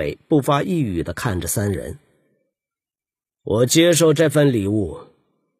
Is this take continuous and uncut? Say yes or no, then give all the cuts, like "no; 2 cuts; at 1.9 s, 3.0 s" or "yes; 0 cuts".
yes; 0 cuts